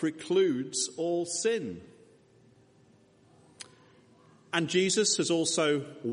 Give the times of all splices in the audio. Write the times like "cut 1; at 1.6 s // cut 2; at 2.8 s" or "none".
none